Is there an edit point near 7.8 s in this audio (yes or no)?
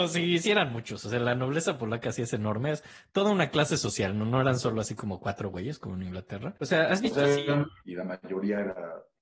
yes